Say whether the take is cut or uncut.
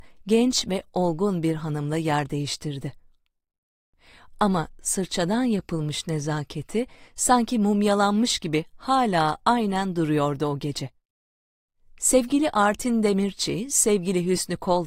uncut